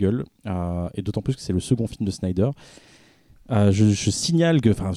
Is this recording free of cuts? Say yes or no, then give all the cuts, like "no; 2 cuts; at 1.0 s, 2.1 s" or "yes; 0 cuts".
yes; 0 cuts